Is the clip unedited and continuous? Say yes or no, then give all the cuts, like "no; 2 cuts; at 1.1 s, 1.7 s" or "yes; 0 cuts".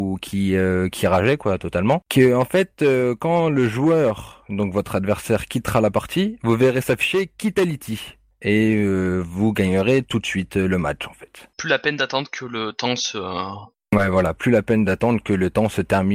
yes; 0 cuts